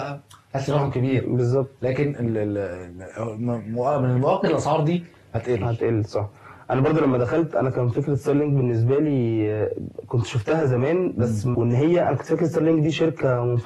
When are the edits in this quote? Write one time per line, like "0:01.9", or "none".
0:11.5